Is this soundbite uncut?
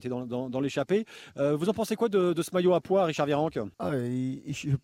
no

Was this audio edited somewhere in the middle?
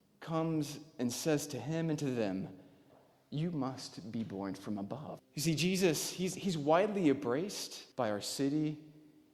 yes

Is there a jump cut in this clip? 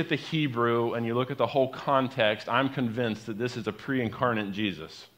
no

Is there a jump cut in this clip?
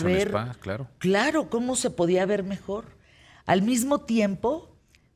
no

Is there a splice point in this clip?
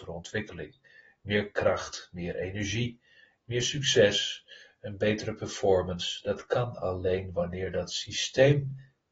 no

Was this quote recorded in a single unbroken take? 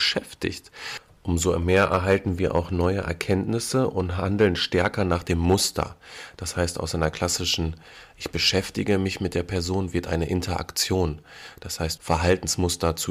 no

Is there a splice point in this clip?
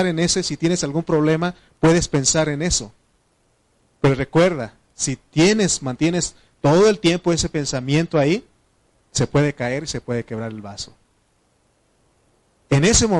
no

